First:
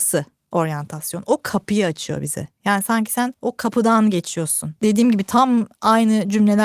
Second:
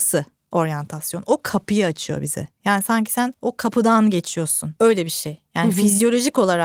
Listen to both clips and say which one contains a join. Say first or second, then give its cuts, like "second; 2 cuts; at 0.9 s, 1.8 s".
first; 1 cut; at 4.8 s